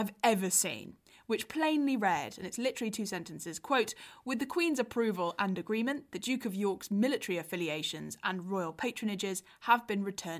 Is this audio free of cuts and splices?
yes; 0 cuts

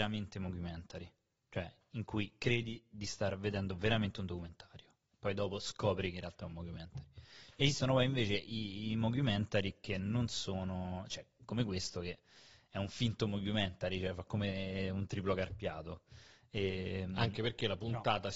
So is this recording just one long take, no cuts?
yes; 0 cuts

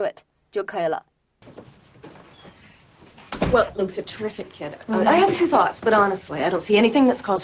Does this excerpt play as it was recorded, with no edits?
yes; 0 cuts

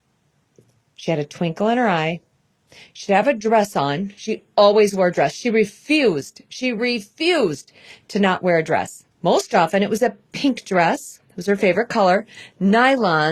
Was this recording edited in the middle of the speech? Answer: yes; 1 cut; at 9.1 s

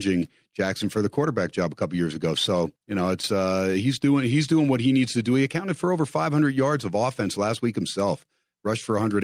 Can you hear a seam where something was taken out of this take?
yes; 1 cut; at 2.8 s

